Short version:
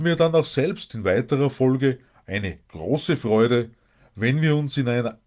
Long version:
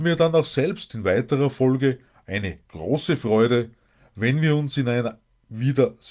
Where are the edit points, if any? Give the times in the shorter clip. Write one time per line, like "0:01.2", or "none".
none